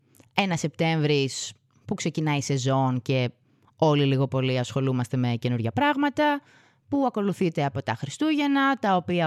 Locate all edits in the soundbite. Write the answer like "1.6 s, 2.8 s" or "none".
none